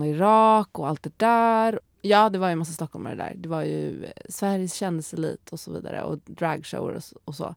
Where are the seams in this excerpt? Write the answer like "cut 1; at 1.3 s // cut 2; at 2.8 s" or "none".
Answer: cut 1; at 1.8 s